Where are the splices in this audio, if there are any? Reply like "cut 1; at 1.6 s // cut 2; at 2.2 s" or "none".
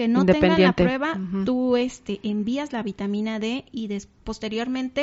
none

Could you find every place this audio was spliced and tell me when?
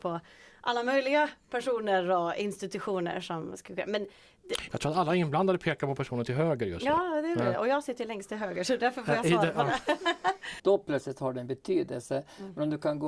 cut 1; at 10.6 s

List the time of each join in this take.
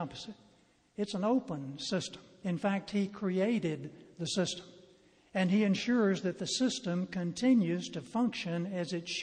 cut 1; at 2.4 s

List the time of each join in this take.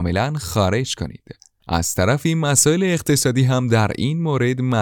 cut 1; at 1.6 s

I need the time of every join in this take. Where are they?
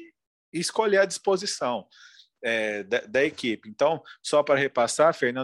none

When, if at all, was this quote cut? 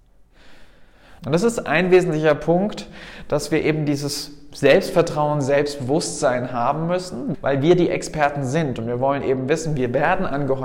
cut 1; at 1.2 s // cut 2; at 7.3 s

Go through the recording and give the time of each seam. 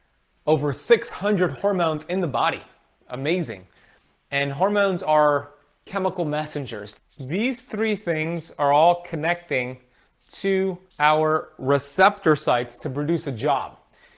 cut 1; at 7.0 s // cut 2; at 10.9 s

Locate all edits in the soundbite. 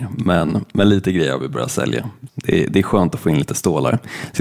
cut 1; at 2.3 s

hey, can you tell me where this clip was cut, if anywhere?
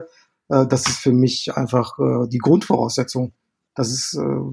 none

